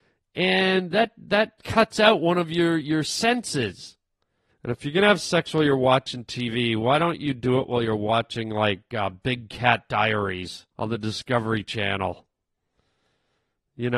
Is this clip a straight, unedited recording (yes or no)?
no